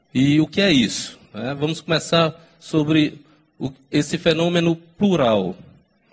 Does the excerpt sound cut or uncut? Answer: uncut